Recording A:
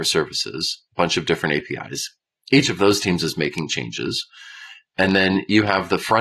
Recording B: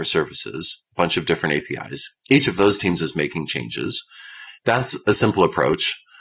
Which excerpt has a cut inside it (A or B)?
B